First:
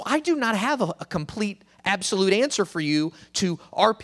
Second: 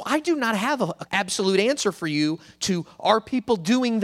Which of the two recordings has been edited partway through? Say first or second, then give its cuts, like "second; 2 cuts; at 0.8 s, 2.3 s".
second; 1 cut; at 1.1 s